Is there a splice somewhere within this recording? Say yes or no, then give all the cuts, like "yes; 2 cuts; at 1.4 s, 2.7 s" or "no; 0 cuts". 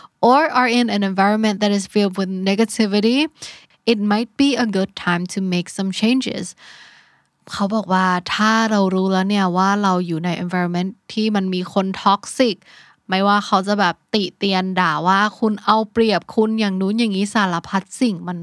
no; 0 cuts